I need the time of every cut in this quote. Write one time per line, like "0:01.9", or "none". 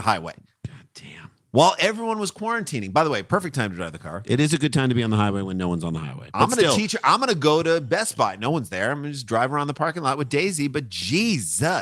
none